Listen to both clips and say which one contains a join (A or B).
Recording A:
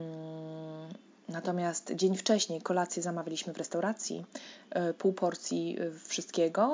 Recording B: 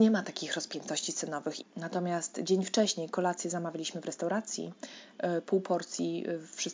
B